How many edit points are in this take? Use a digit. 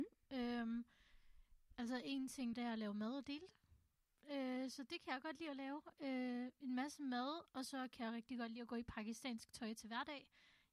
1